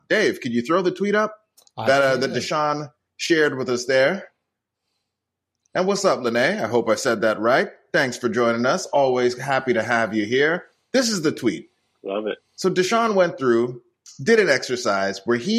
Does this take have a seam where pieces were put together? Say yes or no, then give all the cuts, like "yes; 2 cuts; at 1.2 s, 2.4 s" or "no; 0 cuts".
no; 0 cuts